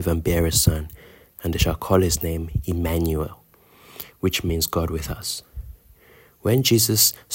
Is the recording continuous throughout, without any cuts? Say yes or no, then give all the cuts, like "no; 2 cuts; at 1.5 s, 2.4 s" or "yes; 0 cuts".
yes; 0 cuts